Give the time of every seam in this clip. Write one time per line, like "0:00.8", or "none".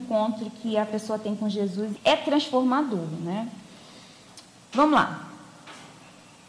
0:02.0

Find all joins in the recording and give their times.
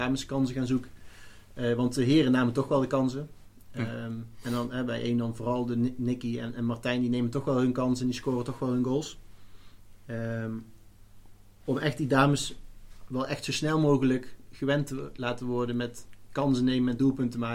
none

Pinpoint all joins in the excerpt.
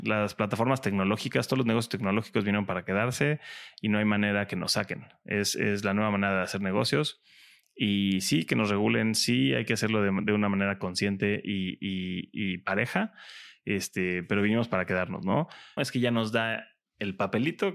0:15.8

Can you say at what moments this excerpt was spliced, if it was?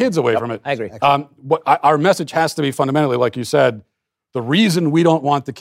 none

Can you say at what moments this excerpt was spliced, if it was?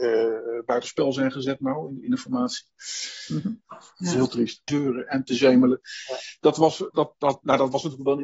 0:03.6
0:04.7
0:06.9

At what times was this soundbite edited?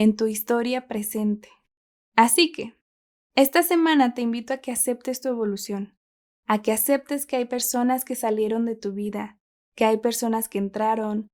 none

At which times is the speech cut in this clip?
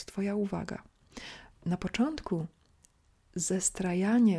0:01.5

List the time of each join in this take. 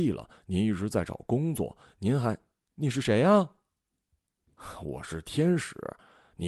none

